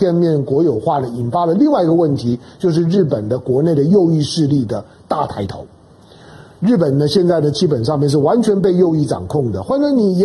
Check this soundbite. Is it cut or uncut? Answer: uncut